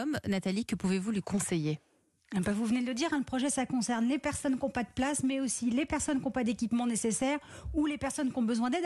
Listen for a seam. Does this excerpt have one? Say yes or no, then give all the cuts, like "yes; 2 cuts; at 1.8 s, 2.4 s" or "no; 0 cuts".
no; 0 cuts